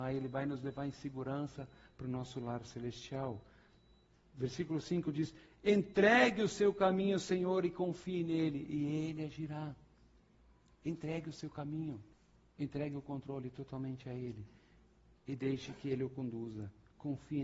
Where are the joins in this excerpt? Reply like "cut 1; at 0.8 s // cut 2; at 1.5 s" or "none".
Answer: none